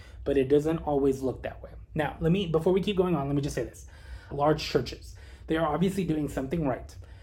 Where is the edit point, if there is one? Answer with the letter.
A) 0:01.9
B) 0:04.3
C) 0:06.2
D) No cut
B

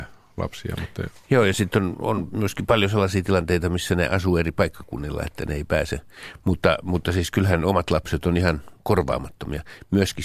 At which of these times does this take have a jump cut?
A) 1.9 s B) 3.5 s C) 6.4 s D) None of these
A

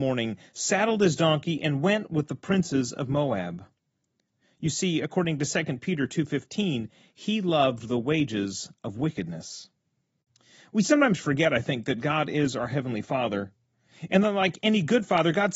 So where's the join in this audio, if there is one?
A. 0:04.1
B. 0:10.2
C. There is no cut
C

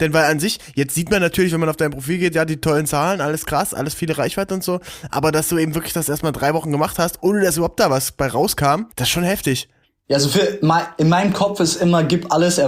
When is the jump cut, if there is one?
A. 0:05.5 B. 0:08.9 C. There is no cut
B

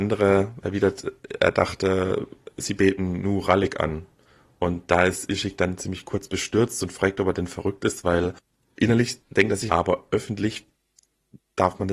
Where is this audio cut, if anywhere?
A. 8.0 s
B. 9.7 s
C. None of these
B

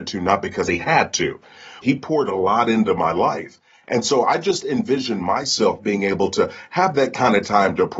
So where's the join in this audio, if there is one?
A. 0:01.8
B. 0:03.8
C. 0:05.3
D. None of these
A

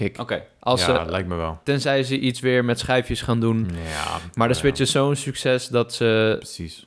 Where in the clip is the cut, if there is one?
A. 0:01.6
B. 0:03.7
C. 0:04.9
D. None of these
D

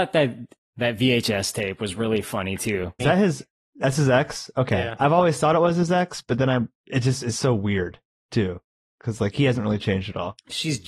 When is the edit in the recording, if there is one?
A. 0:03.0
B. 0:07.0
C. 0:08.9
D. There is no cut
A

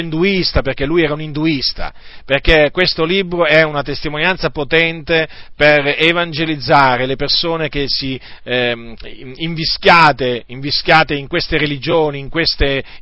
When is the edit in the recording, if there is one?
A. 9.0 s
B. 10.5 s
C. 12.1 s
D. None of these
A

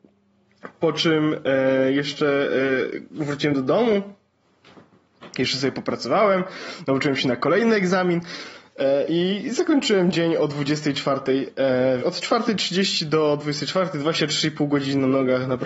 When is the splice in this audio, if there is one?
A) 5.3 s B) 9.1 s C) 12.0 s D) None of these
C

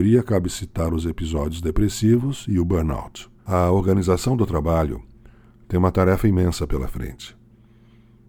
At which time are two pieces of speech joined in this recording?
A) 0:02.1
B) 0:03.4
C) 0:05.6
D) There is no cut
B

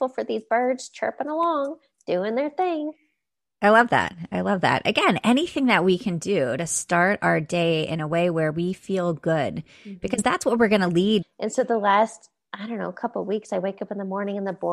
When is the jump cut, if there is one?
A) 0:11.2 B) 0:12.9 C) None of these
A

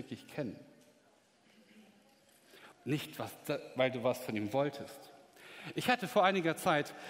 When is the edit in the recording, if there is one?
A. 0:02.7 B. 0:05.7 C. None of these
A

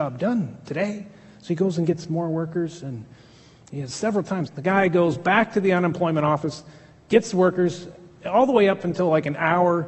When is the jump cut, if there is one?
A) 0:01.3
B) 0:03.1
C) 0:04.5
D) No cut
C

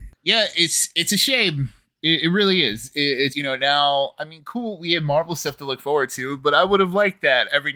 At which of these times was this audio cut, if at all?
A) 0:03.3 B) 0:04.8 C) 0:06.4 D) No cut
A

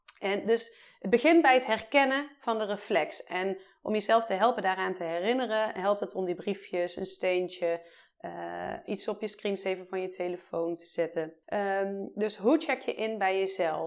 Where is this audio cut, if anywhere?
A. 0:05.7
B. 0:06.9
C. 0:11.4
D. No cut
C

